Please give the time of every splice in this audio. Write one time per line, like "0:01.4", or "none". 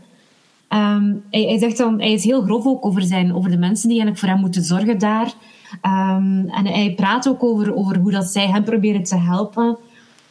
none